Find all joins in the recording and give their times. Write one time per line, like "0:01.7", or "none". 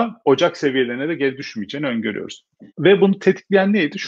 0:02.7